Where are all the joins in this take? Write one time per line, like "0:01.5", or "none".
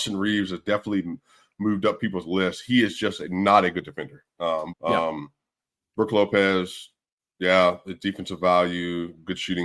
0:04.7